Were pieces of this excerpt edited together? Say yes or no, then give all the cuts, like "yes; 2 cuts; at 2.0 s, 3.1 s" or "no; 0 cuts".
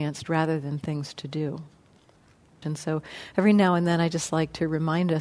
yes; 1 cut; at 2.6 s